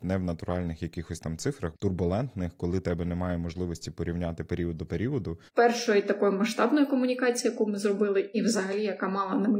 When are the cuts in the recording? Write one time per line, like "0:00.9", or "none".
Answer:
0:01.7
0:05.5
0:08.3